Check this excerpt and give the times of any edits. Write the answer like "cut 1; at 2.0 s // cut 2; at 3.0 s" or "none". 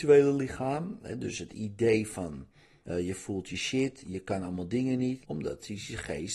cut 1; at 2.8 s // cut 2; at 5.2 s

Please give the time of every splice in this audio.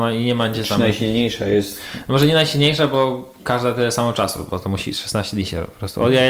none

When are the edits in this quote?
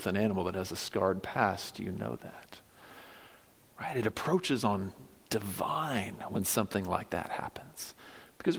cut 1; at 3.7 s

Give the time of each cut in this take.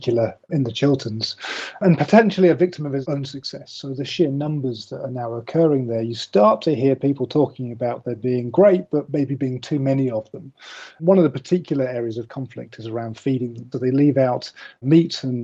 cut 1; at 13.7 s

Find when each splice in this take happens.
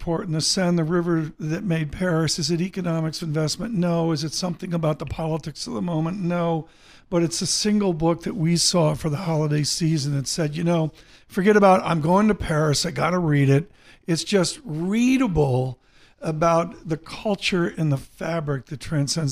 cut 1; at 3.2 s

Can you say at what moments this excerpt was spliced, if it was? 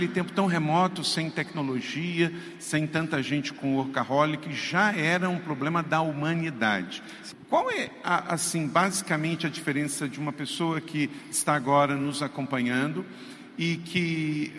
cut 1; at 7.3 s

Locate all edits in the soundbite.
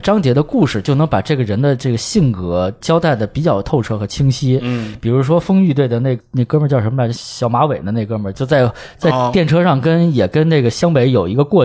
none

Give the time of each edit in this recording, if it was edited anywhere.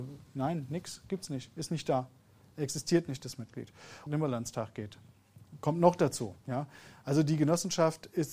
cut 1; at 4.1 s // cut 2; at 6.4 s

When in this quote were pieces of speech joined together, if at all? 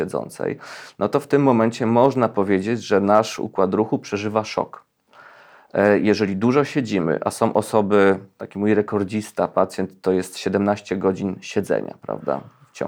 none

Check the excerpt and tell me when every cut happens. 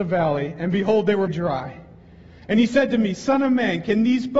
cut 1; at 1.3 s

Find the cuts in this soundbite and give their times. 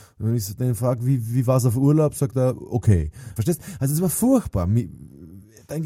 cut 1; at 3.4 s

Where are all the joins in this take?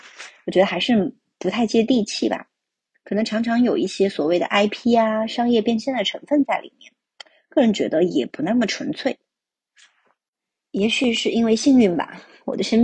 cut 1; at 2.9 s

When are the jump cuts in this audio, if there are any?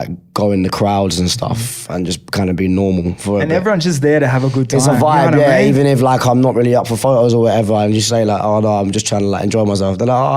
none

